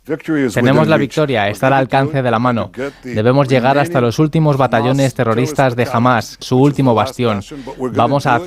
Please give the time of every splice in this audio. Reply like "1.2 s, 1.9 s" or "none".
6.4 s